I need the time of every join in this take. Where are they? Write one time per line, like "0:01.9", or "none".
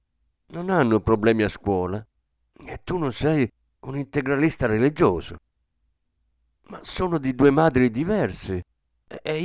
none